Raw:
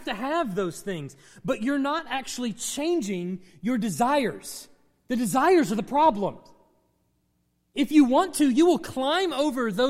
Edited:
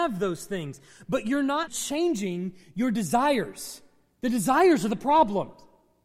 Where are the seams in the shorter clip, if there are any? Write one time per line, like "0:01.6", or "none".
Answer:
0:01.7